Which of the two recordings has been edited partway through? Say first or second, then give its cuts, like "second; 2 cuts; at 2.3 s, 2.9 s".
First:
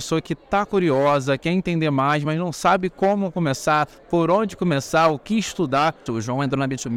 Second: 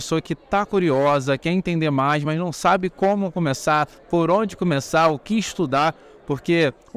first; 1 cut; at 6.1 s